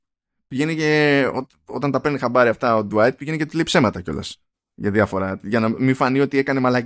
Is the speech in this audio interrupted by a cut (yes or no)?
no